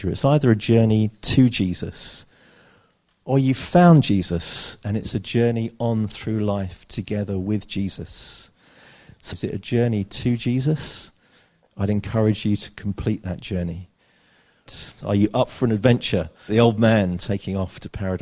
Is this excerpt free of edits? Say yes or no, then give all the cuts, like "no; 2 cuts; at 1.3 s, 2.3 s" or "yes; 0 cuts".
no; 3 cuts; at 9.3 s, 14.7 s, 16.5 s